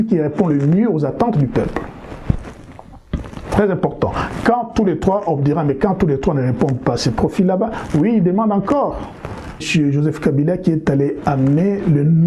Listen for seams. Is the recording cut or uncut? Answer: cut